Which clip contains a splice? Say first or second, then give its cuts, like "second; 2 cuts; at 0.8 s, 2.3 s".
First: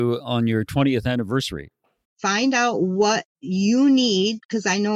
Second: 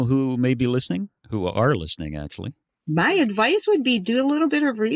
first; 1 cut; at 2.0 s